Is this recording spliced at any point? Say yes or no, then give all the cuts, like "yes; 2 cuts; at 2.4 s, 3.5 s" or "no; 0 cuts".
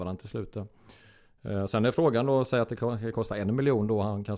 no; 0 cuts